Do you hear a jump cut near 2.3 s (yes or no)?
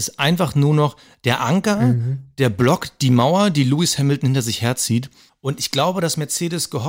no